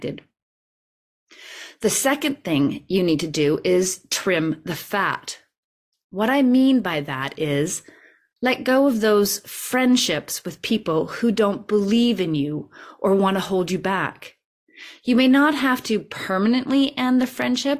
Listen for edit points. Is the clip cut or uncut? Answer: uncut